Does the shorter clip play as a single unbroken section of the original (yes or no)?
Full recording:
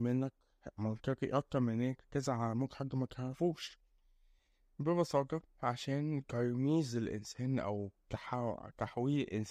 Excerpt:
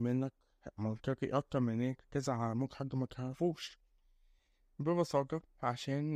yes